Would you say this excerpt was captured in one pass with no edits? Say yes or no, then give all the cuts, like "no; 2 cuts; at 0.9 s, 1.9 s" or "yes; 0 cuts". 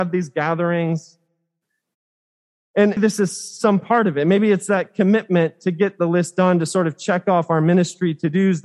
no; 1 cut; at 3.0 s